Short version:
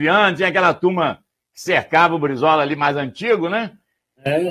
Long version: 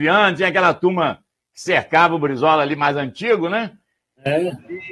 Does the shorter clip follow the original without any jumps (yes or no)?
yes